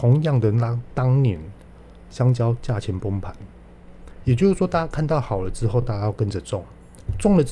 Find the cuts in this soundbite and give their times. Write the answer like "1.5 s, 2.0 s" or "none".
none